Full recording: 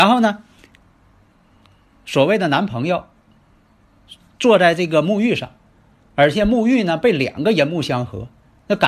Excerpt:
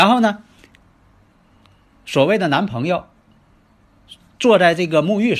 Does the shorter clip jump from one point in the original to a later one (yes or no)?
no